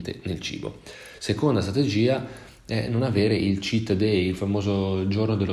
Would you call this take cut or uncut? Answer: uncut